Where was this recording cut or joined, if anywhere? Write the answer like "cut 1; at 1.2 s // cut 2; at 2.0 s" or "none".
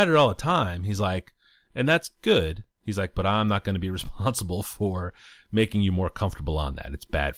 none